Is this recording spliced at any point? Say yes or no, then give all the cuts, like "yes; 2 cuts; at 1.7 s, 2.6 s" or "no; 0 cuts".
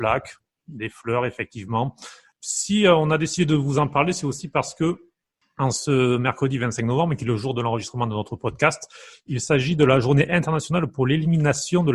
no; 0 cuts